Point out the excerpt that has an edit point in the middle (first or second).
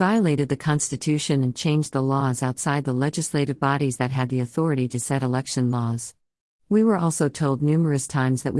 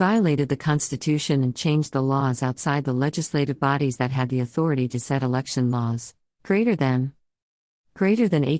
second